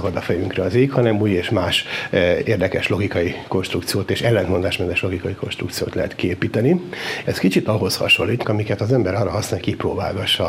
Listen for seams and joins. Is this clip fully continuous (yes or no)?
no